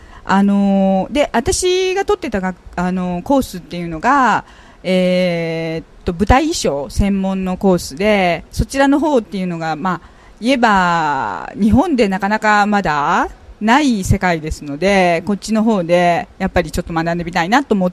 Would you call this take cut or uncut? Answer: cut